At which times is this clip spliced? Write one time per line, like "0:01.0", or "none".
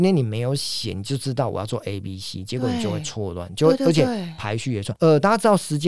none